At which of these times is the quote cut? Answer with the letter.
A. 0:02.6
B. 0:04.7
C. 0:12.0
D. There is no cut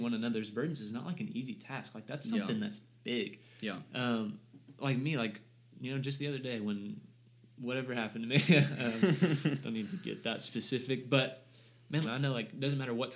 C